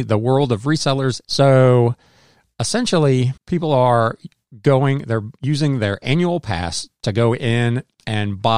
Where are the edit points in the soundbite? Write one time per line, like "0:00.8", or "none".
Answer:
0:01.2
0:03.4